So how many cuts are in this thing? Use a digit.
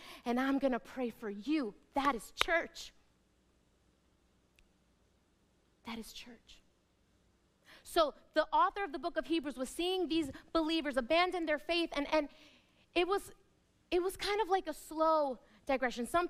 1